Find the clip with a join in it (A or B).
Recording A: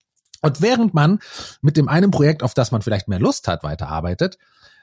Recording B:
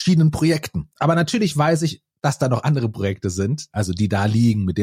B